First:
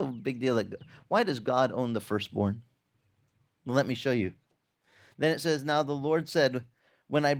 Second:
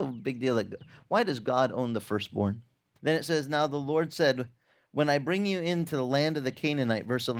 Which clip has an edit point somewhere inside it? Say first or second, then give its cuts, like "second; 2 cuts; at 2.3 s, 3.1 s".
second; 1 cut; at 3.0 s